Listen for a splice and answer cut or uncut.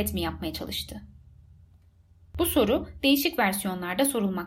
uncut